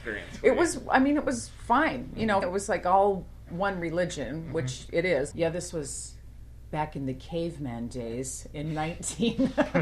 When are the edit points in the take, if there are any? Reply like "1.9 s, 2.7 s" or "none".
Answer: 2.4 s, 5.3 s